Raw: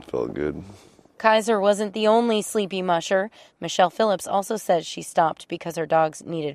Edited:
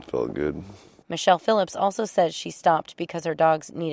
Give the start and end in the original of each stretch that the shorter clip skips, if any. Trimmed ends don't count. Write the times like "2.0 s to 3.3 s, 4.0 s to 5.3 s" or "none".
1.0 s to 3.5 s